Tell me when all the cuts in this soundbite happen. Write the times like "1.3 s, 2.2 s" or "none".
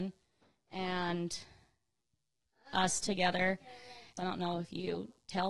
4.2 s